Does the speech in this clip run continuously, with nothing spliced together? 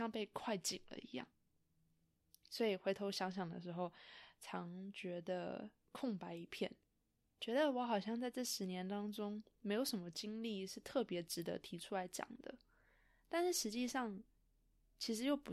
yes; 0 cuts

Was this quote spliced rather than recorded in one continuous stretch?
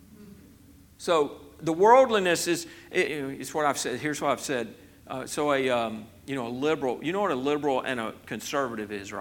yes; 1 cut; at 3.0 s

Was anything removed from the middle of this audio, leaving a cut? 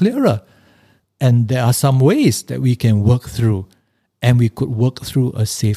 no; 0 cuts

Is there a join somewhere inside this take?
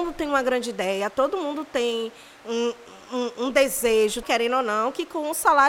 yes; 1 cut; at 4.2 s

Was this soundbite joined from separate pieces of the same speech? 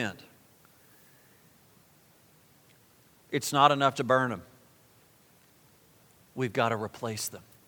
yes; 1 cut; at 3.9 s

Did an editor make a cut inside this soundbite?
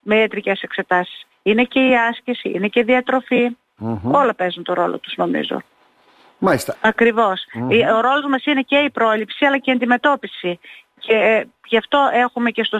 yes; 1 cut; at 6.7 s

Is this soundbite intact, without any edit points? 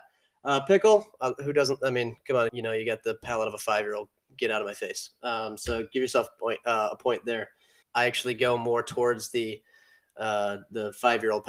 no; 2 cuts; at 2.5 s, 7.8 s

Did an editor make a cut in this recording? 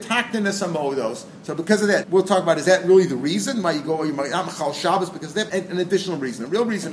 yes; 2 cuts; at 2.0 s, 5.5 s

